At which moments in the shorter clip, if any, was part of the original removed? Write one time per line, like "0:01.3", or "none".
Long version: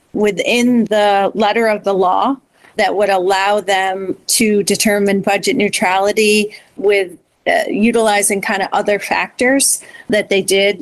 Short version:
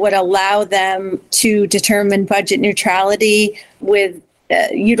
none